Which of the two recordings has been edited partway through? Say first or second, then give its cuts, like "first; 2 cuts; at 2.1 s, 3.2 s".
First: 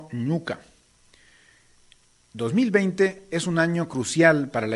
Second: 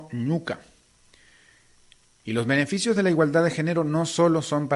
second; 1 cut; at 2.2 s